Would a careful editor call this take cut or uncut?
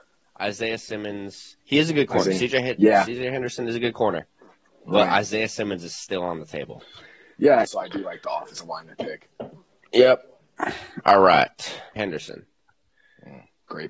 cut